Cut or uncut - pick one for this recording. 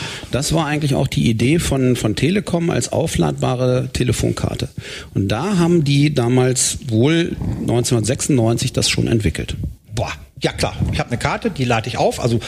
cut